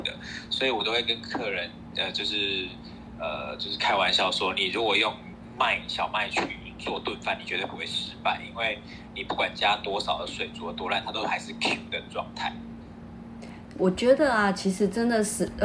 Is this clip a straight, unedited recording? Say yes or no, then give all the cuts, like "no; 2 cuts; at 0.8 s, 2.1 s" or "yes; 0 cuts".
yes; 0 cuts